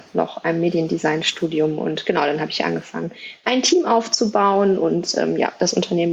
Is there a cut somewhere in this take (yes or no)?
no